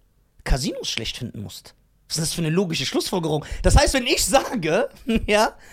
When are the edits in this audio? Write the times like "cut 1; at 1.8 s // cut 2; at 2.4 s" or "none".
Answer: none